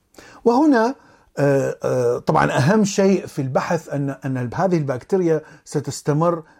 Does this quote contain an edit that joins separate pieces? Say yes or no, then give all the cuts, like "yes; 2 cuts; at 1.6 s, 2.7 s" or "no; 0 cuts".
no; 0 cuts